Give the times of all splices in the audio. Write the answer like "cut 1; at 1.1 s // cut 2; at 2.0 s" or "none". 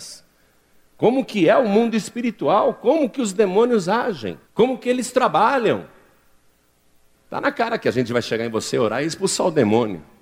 cut 1; at 4.4 s // cut 2; at 7.1 s